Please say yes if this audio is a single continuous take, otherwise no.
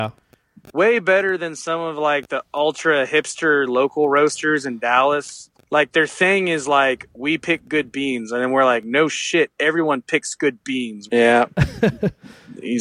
no